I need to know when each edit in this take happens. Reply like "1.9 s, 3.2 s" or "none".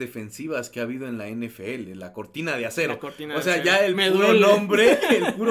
none

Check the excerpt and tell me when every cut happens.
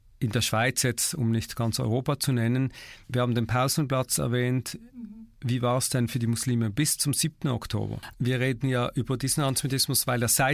3.0 s, 8.1 s

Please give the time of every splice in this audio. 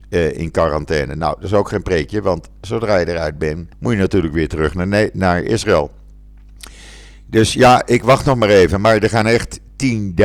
3.7 s

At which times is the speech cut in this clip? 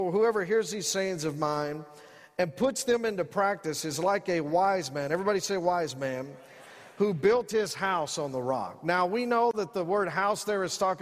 none

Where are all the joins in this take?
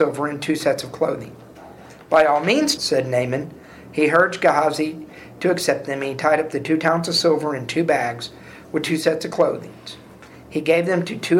2.8 s

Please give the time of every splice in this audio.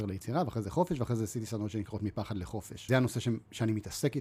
2.9 s

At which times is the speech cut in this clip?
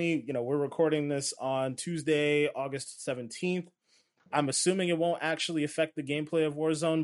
4.3 s

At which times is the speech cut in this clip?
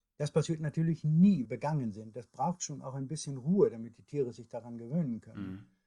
1.5 s

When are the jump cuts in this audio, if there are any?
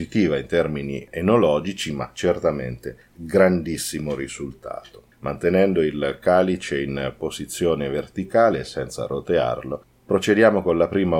5.1 s

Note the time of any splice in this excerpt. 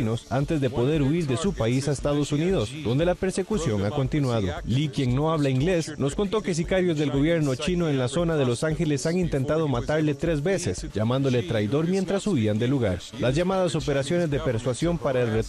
10.9 s, 13.1 s

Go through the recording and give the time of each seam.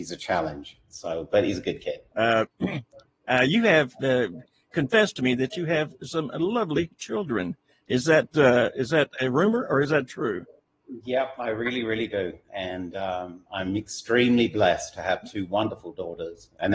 2.1 s

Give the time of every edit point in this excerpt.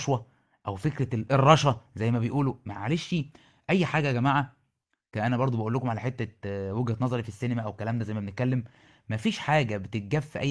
none

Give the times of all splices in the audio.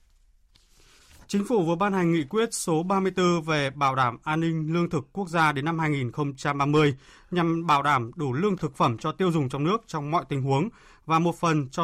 8.6 s

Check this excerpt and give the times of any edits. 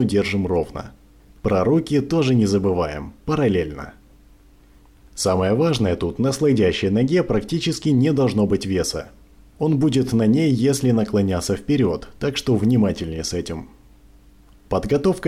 none

